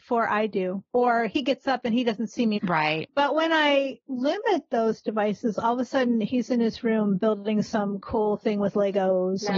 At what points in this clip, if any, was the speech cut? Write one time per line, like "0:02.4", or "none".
0:02.6